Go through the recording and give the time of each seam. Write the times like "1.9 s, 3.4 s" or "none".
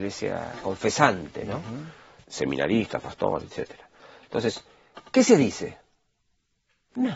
2.2 s